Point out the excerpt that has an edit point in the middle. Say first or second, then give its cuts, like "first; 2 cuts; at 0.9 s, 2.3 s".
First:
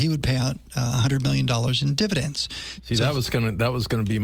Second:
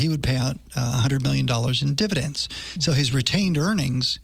first; 1 cut; at 2.8 s